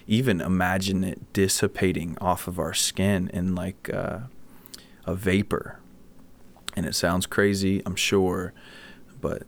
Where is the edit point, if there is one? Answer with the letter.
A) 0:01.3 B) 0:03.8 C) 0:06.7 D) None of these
D